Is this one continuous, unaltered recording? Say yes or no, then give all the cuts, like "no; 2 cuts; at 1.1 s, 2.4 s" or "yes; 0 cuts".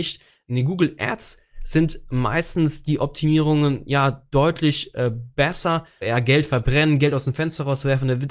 no; 1 cut; at 6.0 s